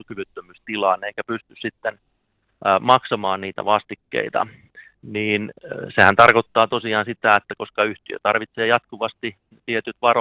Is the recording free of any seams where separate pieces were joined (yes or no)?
yes